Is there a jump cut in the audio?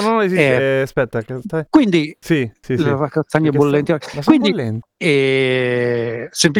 yes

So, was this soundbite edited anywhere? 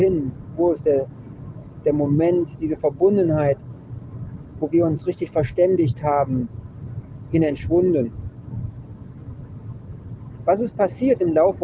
no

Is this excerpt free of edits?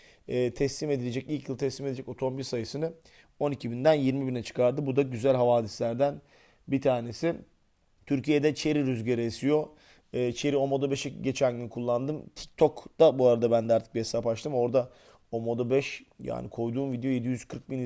yes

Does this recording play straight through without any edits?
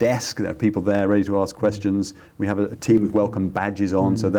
no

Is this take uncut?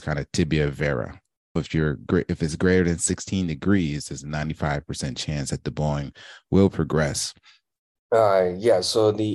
no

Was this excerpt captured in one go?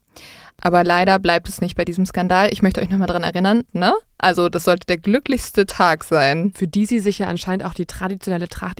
no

